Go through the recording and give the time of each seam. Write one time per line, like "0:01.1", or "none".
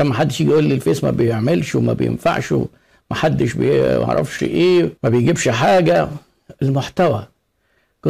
0:05.0